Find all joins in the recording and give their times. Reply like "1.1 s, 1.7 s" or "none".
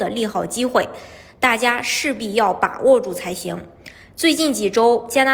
4.1 s